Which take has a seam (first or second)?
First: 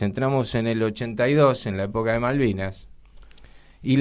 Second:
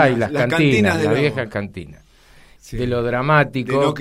second